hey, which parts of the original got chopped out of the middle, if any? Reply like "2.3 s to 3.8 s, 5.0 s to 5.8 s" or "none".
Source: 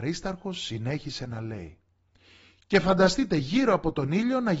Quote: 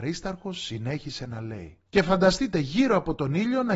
1.9 s to 2.6 s